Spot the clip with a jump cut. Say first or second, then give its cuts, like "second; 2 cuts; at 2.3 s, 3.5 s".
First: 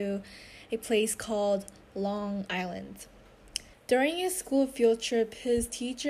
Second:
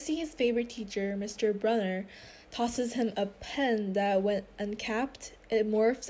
first; 1 cut; at 3.7 s